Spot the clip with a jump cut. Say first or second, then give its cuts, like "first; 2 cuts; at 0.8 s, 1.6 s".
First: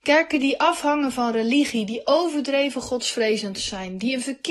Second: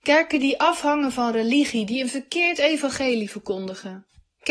second; 1 cut; at 1.9 s